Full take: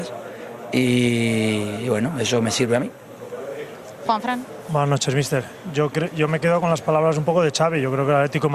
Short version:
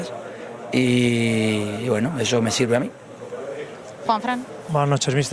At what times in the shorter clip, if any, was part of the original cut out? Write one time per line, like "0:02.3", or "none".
none